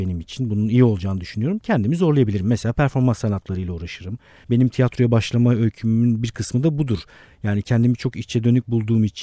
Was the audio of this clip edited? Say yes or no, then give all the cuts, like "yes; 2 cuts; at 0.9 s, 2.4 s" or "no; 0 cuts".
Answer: no; 0 cuts